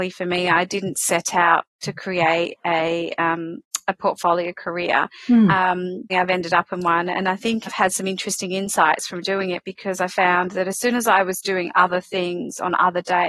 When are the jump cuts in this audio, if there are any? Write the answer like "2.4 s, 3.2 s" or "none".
6.1 s, 7.7 s